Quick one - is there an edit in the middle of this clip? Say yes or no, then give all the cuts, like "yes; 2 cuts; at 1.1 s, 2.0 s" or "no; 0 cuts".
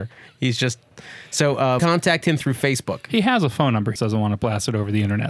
yes; 2 cuts; at 1.8 s, 4.0 s